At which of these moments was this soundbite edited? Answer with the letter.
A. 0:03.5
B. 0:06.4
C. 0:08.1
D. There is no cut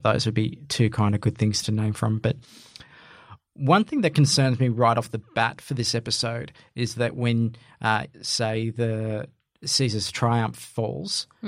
C